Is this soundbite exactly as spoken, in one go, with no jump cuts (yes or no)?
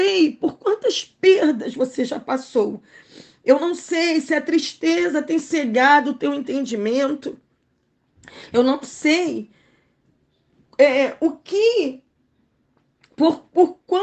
yes